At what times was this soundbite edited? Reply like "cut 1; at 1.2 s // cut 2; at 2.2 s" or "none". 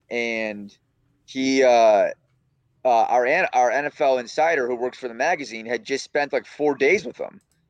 none